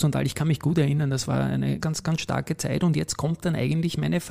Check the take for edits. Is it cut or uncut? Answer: cut